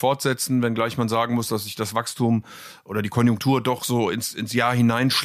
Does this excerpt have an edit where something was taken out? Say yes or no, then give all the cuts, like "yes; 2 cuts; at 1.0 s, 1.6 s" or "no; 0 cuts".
no; 0 cuts